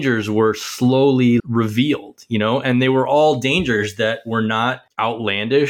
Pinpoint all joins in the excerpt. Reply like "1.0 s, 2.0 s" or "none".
1.4 s